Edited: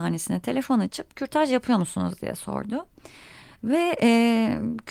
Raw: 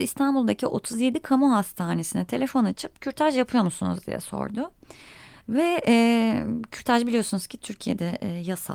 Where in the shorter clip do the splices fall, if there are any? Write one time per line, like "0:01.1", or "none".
none